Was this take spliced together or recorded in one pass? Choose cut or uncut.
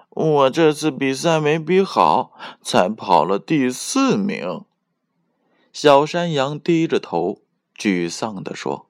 uncut